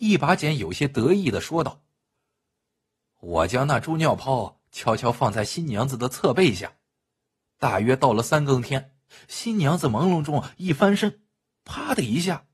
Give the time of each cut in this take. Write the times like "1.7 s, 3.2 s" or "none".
none